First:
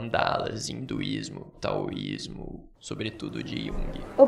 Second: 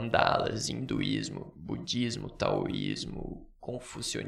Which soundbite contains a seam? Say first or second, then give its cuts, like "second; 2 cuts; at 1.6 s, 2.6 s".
first; 2 cuts; at 1.5 s, 2.7 s